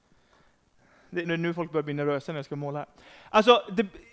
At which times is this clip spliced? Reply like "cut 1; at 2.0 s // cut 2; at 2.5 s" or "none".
cut 1; at 1.2 s

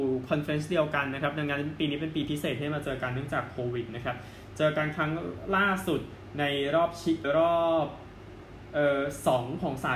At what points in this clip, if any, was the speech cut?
cut 1; at 7.2 s

